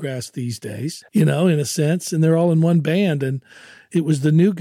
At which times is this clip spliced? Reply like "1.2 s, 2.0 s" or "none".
1.1 s